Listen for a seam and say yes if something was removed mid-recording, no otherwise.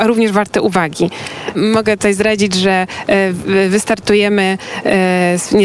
yes